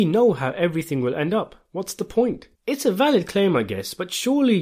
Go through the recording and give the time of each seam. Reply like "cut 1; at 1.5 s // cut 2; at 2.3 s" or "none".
cut 1; at 2.5 s